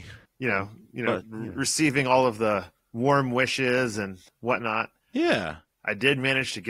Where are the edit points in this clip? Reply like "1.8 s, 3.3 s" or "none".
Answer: none